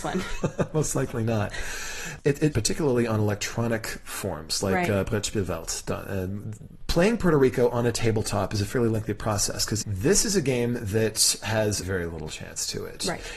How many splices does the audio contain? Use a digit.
3